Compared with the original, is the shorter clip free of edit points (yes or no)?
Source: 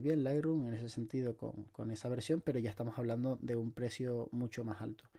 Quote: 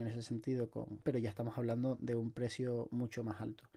no